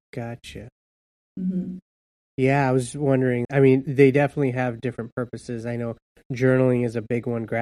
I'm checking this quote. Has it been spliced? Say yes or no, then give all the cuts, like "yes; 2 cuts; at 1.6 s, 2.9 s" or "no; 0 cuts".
yes; 1 cut; at 3.4 s